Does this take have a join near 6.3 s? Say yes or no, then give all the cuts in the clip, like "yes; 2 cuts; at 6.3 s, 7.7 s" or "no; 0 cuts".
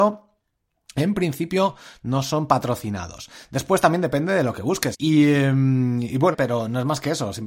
yes; 2 cuts; at 4.9 s, 6.3 s